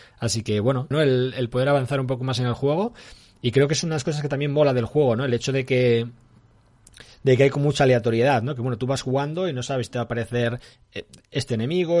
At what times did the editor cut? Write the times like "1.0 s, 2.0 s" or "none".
0.9 s